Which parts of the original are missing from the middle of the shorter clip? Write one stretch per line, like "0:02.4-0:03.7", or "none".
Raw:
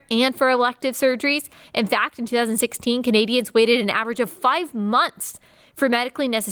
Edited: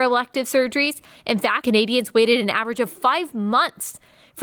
0:02.1-0:03.0